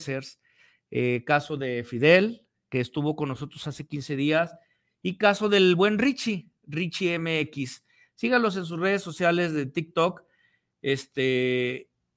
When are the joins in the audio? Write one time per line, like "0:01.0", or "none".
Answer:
none